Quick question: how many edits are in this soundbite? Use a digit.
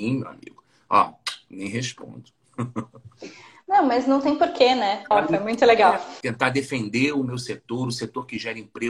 2